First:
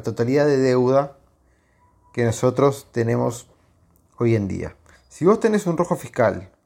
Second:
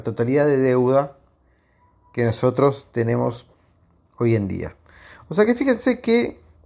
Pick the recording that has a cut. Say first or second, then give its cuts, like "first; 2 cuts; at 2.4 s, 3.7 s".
first; 1 cut; at 4.9 s